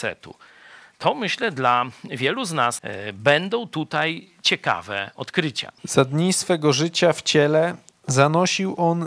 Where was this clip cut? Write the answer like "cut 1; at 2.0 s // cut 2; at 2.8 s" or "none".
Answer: cut 1; at 2.8 s // cut 2; at 5.8 s

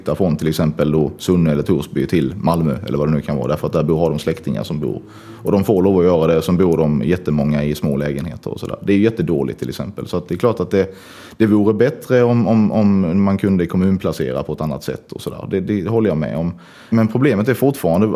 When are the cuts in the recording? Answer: none

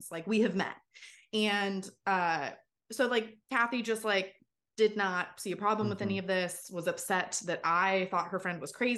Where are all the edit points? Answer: cut 1; at 3.4 s

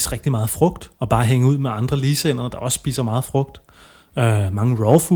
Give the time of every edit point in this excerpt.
cut 1; at 1.0 s

